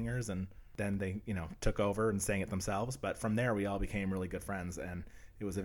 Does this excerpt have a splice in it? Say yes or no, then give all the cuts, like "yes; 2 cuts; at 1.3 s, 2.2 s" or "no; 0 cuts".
no; 0 cuts